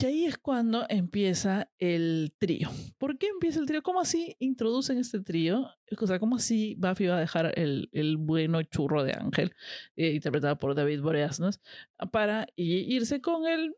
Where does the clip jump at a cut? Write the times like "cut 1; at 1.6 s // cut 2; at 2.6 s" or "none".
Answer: none